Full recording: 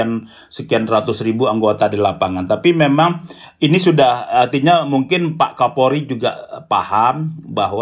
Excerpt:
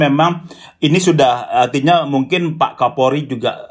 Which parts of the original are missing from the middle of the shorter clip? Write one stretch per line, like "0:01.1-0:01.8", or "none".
none